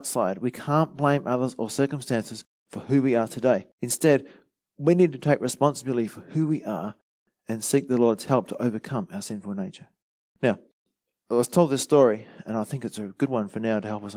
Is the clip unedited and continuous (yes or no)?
no